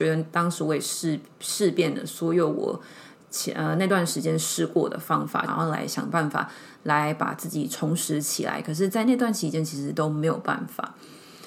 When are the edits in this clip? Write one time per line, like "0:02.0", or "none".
0:05.5